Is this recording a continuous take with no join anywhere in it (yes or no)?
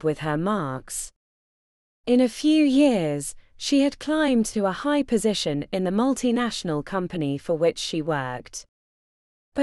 no